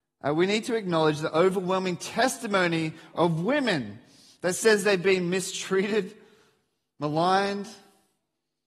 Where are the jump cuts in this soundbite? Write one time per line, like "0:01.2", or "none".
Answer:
none